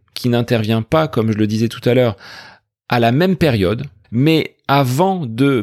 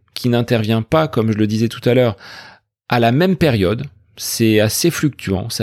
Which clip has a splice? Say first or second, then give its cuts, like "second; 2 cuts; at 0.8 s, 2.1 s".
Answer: first; 1 cut; at 4.0 s